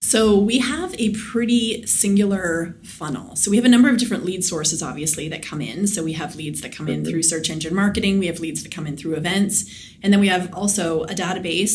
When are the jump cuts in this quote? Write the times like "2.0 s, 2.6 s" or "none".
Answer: none